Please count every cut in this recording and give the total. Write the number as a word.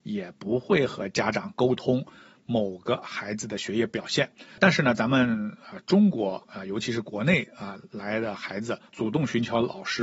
two